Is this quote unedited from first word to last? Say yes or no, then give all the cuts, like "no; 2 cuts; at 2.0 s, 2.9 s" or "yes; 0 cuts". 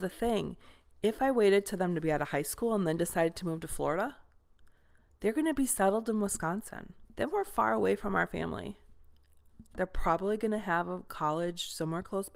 no; 2 cuts; at 7.0 s, 9.7 s